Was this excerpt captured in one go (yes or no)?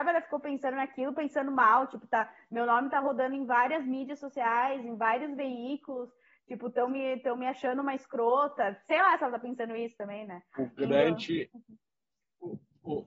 no